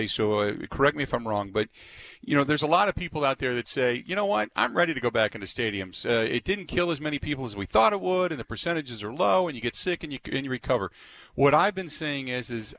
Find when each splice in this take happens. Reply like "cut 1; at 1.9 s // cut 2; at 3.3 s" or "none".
none